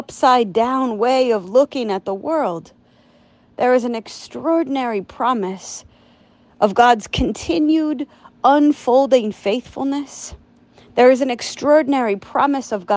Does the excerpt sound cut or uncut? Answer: uncut